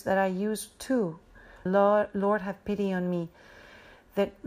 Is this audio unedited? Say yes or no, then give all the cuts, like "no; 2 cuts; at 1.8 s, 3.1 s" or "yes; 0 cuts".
no; 1 cut; at 1.7 s